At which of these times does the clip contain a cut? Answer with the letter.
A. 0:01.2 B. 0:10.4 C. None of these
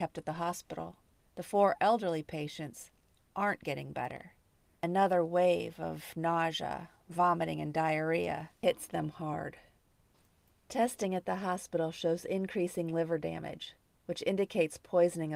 A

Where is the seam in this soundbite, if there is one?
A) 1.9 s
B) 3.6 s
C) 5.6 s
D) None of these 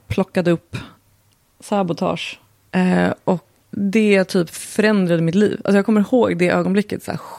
B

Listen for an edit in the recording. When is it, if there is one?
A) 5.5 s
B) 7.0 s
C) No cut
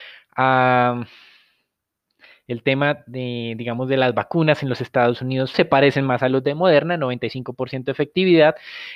A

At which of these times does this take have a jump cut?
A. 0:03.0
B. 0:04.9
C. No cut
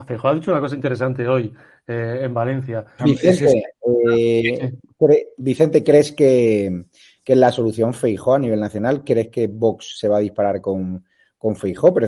A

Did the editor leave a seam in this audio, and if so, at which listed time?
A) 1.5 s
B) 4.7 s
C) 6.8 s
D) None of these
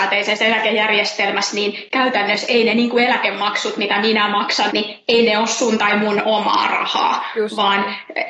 B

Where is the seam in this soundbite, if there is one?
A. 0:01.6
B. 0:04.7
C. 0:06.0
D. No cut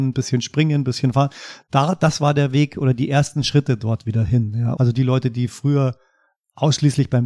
B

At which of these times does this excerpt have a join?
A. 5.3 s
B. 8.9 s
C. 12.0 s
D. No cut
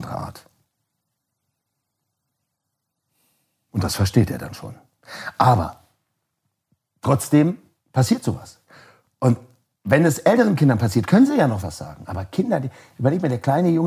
D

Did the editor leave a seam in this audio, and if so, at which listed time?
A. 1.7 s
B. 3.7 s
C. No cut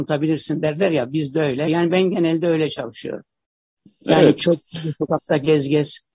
A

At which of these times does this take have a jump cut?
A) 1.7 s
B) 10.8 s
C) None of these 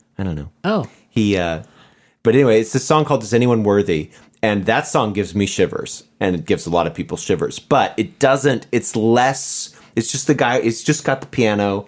C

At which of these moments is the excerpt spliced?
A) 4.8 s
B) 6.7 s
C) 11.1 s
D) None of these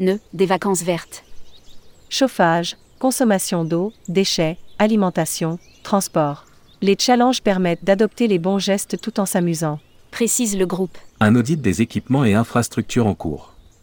C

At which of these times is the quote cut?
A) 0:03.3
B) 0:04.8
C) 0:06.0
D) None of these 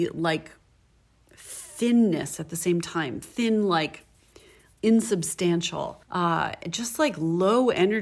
C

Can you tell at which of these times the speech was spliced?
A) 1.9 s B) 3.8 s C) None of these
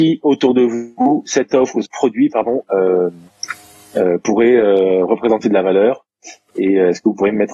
A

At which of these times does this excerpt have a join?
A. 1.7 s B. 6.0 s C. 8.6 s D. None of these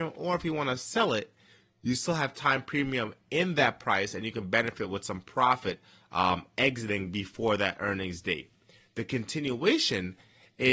D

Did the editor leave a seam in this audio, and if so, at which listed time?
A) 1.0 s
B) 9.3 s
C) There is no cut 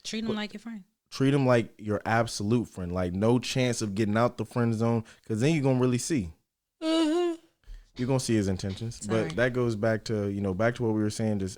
B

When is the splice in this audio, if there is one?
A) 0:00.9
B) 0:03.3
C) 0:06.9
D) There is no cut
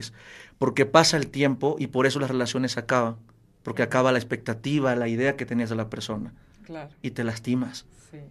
D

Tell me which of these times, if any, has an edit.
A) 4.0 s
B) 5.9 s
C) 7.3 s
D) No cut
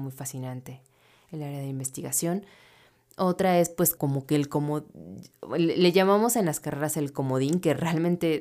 A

